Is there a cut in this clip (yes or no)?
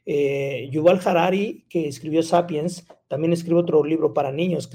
no